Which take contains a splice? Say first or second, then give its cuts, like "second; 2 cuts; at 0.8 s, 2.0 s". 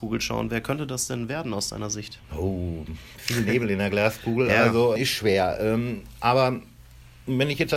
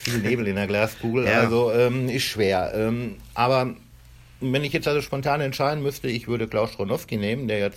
first; 2 cuts; at 2.2 s, 5.0 s